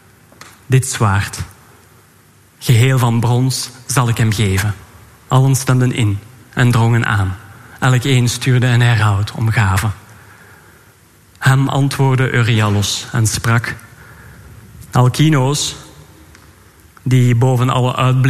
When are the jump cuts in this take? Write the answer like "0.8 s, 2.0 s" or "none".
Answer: 5.3 s